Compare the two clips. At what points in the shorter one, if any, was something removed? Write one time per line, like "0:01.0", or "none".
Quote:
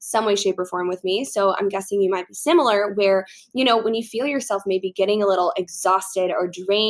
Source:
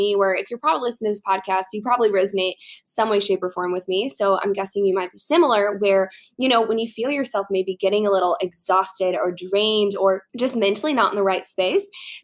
none